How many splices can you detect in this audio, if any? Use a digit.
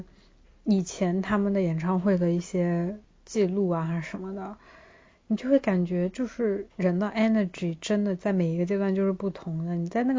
0